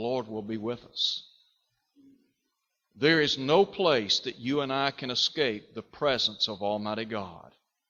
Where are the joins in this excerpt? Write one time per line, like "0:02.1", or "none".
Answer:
none